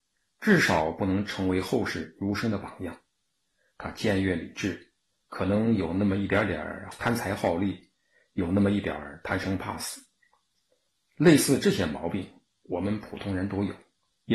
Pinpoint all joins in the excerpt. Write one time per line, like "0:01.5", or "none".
none